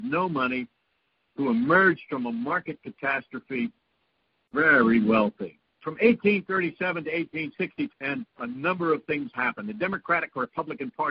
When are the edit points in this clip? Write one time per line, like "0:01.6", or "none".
0:05.8
0:07.9